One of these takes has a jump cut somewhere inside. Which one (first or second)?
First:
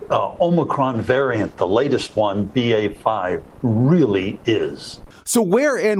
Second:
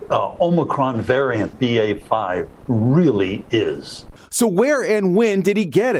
second